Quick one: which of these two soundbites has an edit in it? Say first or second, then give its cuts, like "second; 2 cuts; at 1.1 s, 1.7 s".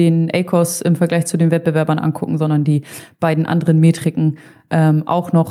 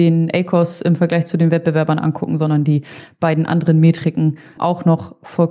second; 1 cut; at 4.6 s